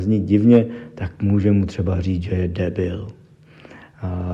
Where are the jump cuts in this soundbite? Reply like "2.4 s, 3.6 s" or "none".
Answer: none